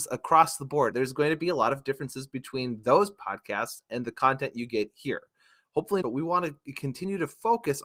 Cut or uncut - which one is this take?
cut